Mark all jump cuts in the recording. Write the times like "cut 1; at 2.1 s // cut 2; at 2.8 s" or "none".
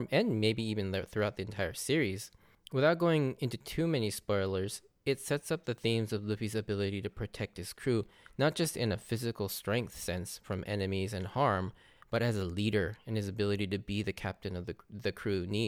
none

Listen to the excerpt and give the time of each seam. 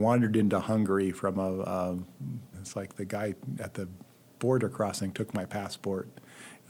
cut 1; at 2.5 s

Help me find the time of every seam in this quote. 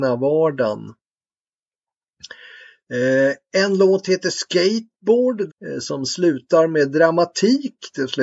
cut 1; at 5.5 s

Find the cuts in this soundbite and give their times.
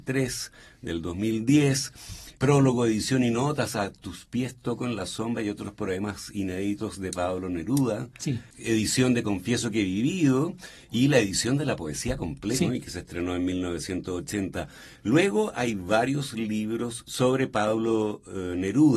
cut 1; at 12.6 s

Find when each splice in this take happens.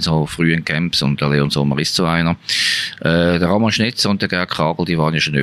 none

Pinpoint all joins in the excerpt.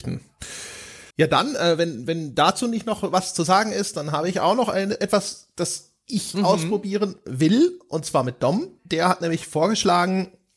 cut 1; at 1.1 s // cut 2; at 8.8 s

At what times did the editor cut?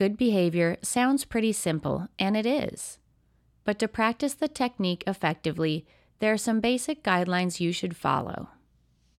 none

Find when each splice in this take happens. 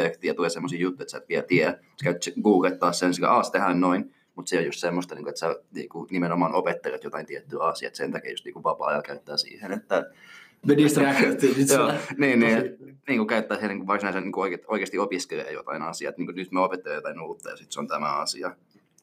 cut 1; at 4.3 s // cut 2; at 10.6 s

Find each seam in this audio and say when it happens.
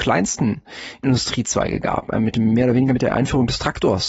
none

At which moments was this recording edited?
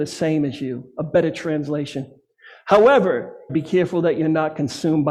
cut 1; at 3.5 s

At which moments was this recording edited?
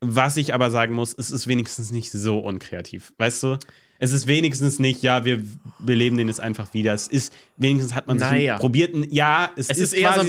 none

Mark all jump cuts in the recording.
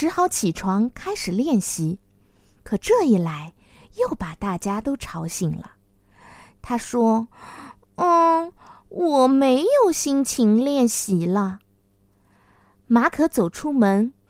cut 1; at 6.5 s

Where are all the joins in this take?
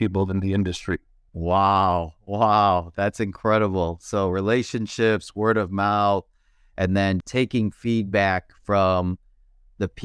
cut 1; at 1.3 s // cut 2; at 7.2 s

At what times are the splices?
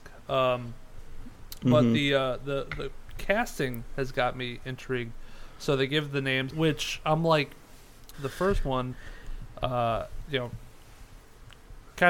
cut 1; at 6.5 s // cut 2; at 8.1 s

